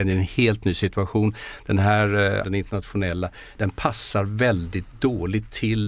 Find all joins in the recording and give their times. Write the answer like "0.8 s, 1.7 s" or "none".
2.4 s, 3.5 s

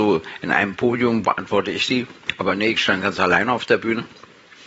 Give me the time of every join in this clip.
1.2 s

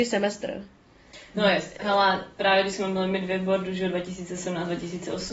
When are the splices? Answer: none

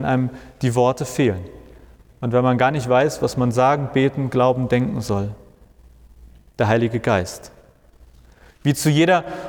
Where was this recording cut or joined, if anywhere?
none

